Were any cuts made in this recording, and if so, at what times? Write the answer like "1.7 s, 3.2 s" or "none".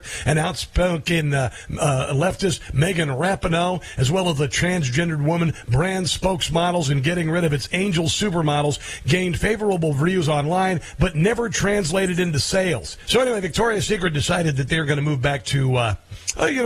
13.1 s